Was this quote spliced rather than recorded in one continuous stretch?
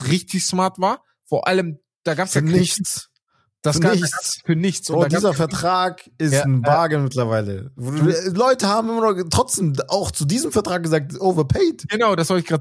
no; 0 cuts

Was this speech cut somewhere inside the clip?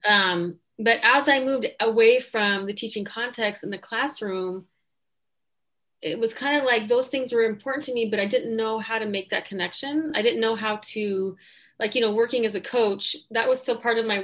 no; 0 cuts

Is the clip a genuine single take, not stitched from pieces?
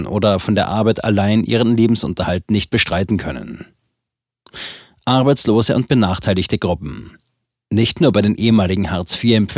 yes; 0 cuts

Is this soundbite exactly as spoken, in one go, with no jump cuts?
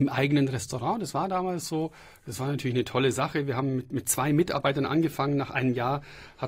yes; 0 cuts

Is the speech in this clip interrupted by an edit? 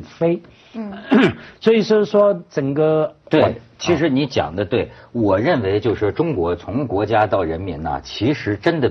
yes; 1 cut; at 3.2 s

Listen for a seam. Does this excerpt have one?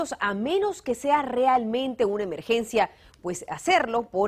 no; 0 cuts

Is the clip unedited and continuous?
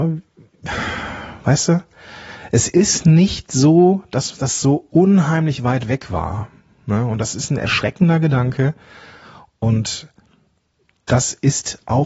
yes; 0 cuts

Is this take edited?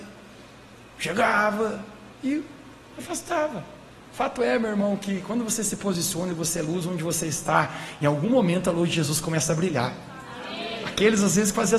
yes; 2 cuts; at 2.1 s, 4.0 s

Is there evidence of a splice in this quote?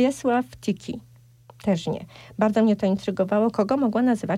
no; 0 cuts

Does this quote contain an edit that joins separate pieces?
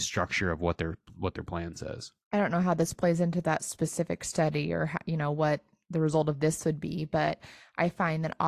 no; 0 cuts

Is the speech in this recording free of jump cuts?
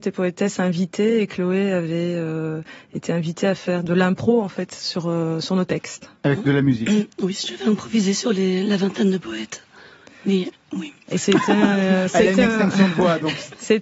yes; 0 cuts

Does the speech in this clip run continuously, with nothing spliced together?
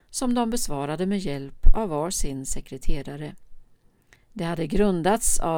no; 1 cut; at 4.1 s

